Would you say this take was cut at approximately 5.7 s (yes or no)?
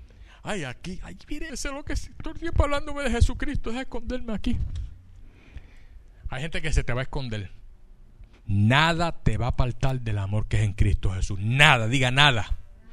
no